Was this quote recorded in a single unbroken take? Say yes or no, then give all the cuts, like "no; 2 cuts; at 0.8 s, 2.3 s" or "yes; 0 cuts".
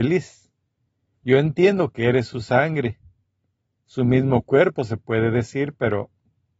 no; 1 cut; at 1.1 s